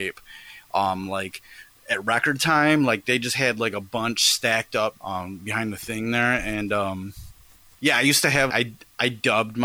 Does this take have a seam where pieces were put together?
yes; 1 cut; at 8.5 s

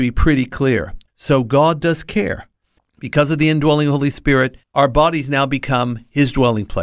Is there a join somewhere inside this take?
yes; 3 cuts; at 1.1 s, 2.8 s, 4.6 s

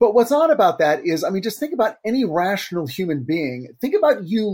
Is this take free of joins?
yes; 0 cuts

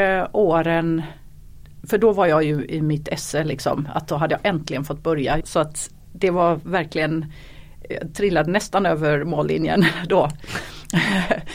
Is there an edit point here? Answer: yes; 2 cuts; at 5.4 s, 7.9 s

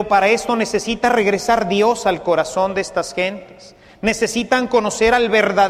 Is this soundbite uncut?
yes; 0 cuts

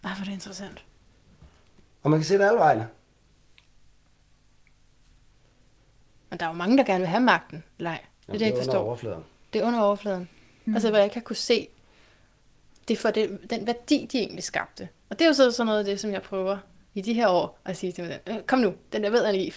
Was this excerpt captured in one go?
no; 1 cut; at 10.7 s

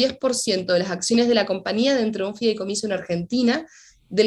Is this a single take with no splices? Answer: yes; 0 cuts

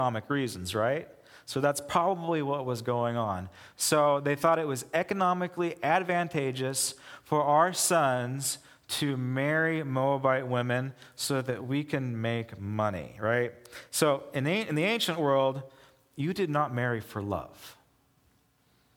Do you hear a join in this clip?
no; 0 cuts

